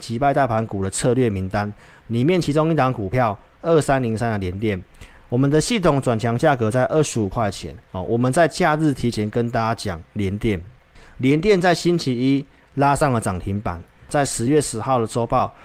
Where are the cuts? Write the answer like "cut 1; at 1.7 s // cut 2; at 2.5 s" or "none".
none